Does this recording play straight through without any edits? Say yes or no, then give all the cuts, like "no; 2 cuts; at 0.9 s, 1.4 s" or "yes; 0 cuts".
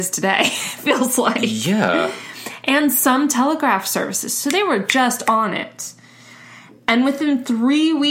yes; 0 cuts